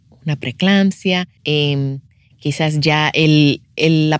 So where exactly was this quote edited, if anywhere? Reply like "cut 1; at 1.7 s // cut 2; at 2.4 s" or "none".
cut 1; at 1.4 s